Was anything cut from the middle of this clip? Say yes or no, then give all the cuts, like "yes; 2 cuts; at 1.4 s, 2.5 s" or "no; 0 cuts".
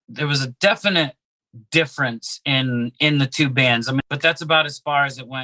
yes; 1 cut; at 4.0 s